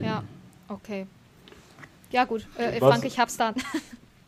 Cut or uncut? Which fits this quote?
uncut